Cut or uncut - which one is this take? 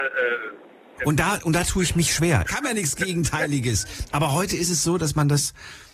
cut